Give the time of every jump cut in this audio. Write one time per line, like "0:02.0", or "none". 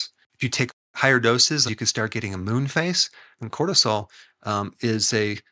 0:01.7
0:03.3